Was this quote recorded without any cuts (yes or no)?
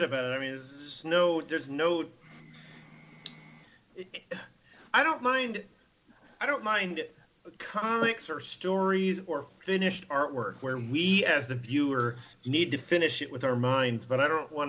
yes